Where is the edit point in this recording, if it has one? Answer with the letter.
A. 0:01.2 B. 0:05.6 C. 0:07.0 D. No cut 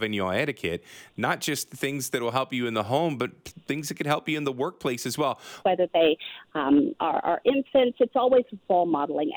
B